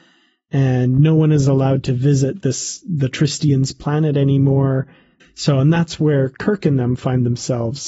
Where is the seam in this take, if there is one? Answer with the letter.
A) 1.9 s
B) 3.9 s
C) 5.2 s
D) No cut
C